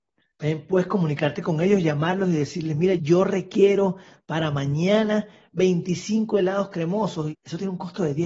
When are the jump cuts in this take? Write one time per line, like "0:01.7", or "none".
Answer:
0:03.0
0:07.3